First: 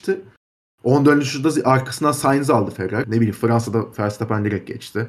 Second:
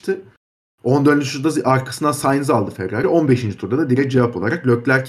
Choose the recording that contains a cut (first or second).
first